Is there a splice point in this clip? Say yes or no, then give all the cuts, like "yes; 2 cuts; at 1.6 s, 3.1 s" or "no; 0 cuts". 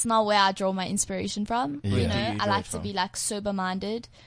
no; 0 cuts